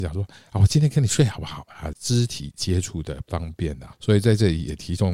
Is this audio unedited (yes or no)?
no